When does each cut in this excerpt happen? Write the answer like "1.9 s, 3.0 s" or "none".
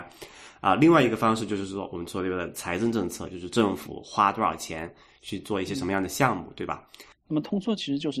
7.1 s

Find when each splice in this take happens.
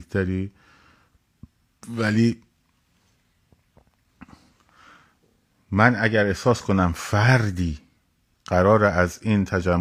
none

